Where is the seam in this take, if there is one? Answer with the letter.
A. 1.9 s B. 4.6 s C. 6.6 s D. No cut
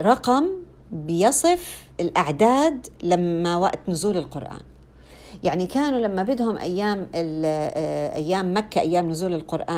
A